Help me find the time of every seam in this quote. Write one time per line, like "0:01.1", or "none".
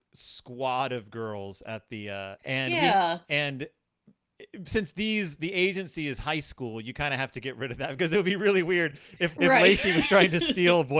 0:02.4
0:09.3

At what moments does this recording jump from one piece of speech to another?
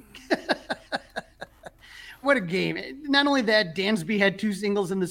0:02.2

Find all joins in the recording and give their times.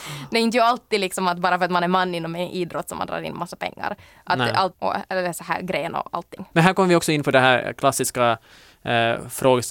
0:04.7
0:06.5

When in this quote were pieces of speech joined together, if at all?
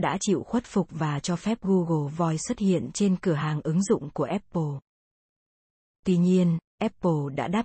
none

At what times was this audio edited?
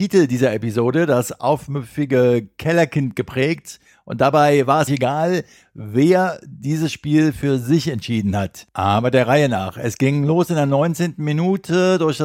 0:04.9

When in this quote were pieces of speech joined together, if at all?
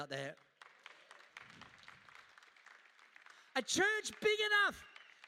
0:03.5

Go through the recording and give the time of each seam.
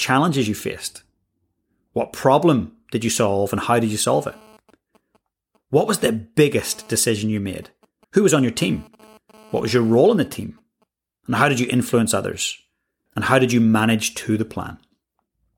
0:08.0
0:13.1

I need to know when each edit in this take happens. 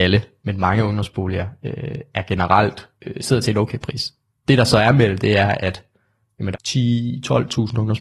0:03.0
0:06.5

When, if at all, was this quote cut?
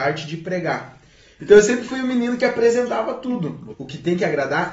0:01.4
0:03.7

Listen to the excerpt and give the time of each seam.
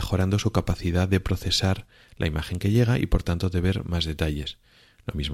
none

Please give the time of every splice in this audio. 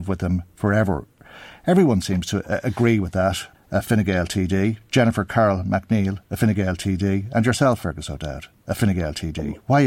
0:03.5

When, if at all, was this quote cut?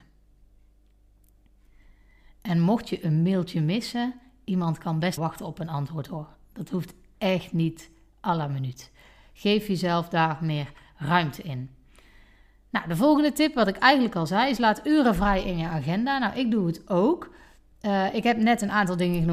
0:05.2

